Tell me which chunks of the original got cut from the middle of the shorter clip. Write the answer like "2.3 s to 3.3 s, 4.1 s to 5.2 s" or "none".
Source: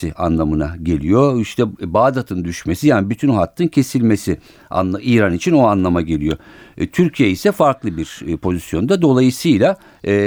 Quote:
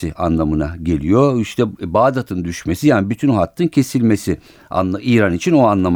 none